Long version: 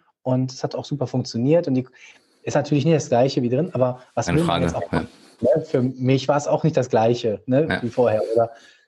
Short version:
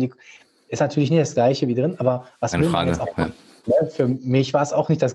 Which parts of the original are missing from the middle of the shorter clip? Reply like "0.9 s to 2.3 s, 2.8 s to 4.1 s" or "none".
none